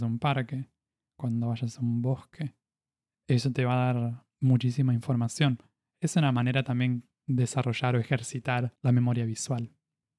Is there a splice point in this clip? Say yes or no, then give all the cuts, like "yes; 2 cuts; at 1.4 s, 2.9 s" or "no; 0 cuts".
no; 0 cuts